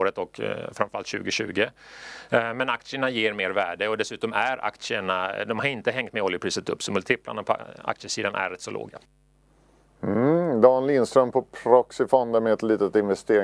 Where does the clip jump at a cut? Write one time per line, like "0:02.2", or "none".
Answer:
none

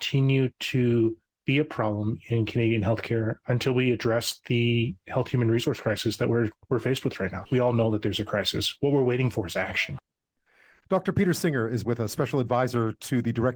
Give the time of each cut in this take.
none

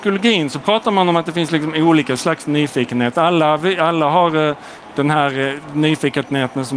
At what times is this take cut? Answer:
none

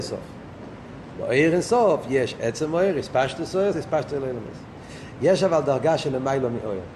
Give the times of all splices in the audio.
0:03.7

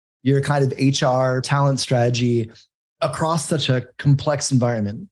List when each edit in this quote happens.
0:01.4

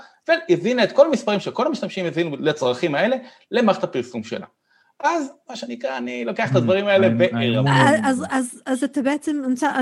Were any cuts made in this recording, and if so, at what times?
none

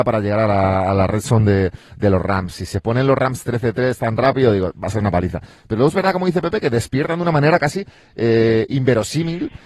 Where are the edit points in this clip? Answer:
none

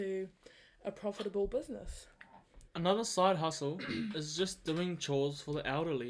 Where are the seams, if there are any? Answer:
0:02.7

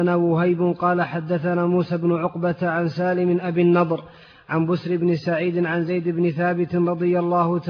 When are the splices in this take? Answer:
none

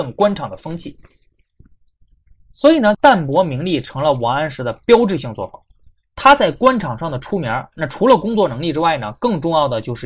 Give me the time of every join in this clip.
0:02.9

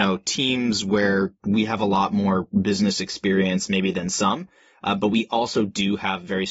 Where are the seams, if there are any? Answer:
none

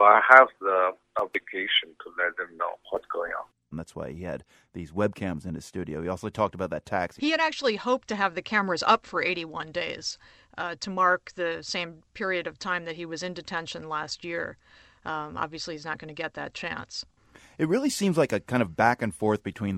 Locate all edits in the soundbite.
0:03.7
0:07.2

